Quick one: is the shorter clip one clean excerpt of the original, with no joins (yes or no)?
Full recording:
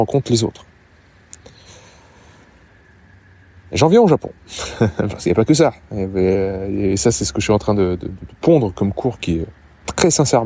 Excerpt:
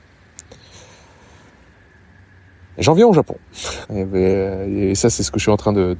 no